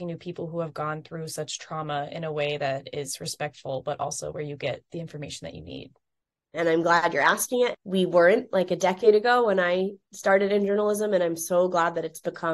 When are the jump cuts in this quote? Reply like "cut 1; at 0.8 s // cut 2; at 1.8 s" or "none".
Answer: cut 1; at 6.5 s // cut 2; at 7.7 s